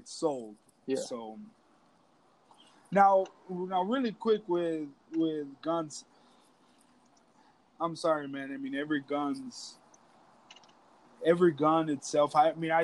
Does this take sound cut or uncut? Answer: uncut